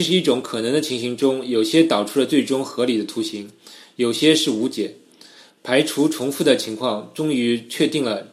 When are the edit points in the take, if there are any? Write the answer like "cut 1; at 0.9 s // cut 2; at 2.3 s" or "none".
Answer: none